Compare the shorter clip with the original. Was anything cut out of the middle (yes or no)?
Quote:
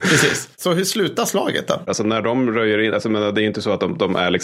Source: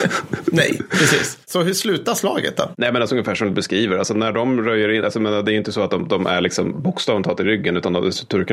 yes